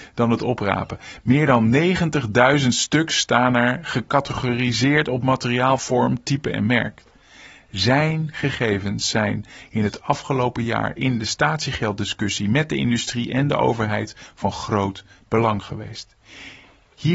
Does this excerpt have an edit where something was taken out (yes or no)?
no